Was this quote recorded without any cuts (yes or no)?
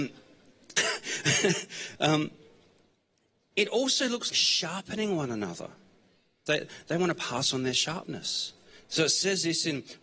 no